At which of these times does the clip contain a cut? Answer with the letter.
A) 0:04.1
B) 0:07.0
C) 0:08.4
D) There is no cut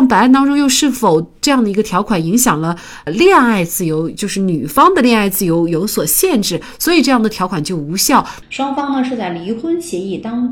C